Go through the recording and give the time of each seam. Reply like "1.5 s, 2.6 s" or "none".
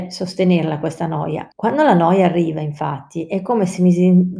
1.5 s